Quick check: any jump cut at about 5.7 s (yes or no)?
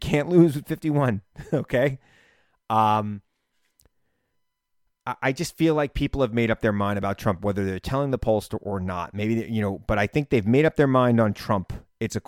no